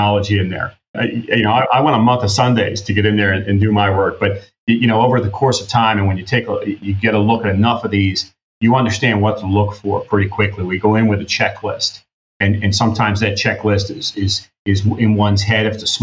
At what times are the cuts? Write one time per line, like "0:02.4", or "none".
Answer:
0:00.9